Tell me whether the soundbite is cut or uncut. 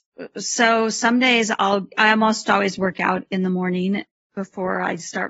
uncut